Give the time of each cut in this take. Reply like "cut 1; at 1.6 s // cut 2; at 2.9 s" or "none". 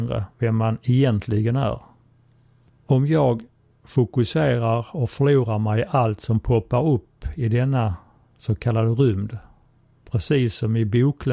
cut 1; at 2.7 s

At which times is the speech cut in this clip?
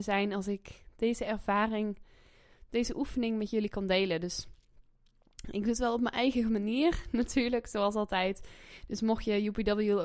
none

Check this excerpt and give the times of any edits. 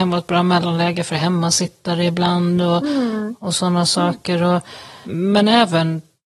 cut 1; at 5.0 s

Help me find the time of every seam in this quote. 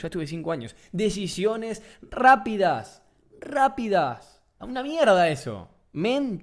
cut 1; at 4.6 s

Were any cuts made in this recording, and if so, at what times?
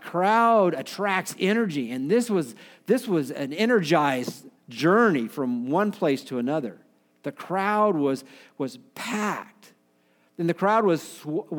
none

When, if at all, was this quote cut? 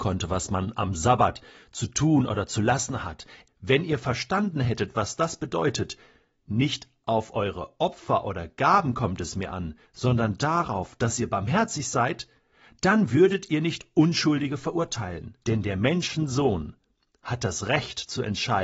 cut 1; at 3.5 s // cut 2; at 15.4 s

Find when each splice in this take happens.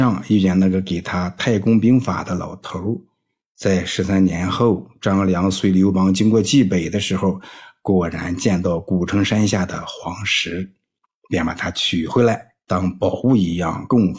none

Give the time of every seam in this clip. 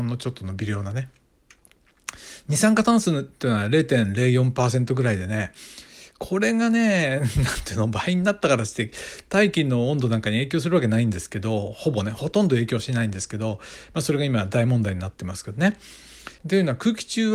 cut 1; at 16.4 s

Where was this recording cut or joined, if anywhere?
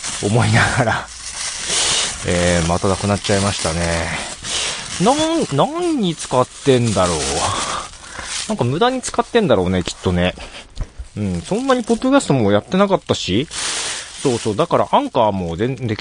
none

